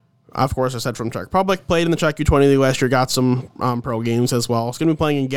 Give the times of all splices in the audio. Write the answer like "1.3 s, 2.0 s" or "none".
none